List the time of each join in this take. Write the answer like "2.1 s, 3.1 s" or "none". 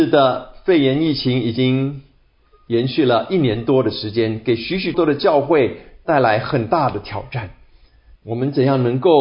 4.9 s, 8.2 s